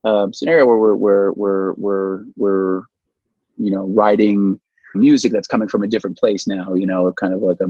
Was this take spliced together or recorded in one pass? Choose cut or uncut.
cut